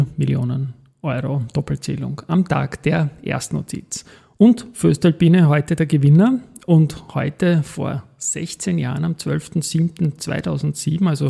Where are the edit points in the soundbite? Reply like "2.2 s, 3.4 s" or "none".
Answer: none